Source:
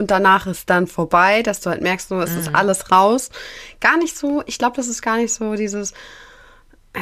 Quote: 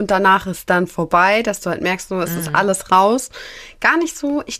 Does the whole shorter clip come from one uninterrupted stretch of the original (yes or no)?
yes